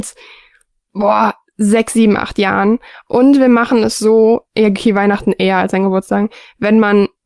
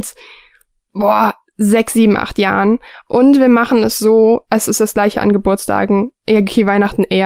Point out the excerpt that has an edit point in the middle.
first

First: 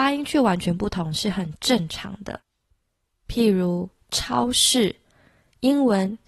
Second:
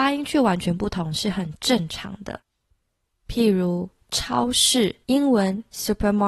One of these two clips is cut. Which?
second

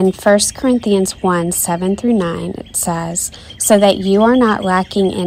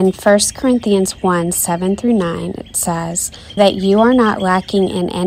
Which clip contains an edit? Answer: second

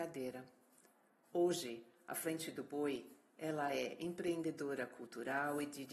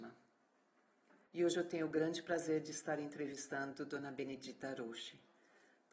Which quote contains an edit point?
second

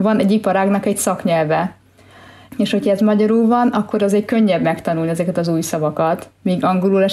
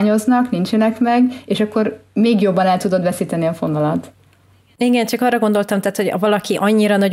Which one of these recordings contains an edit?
first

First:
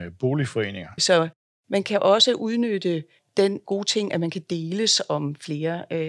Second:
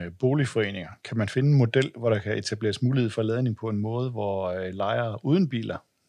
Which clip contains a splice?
first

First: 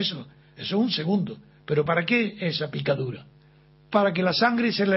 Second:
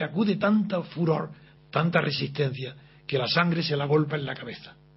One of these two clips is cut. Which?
second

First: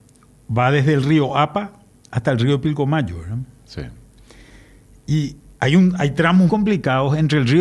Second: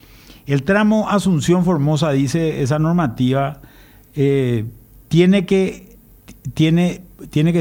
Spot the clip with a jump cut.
first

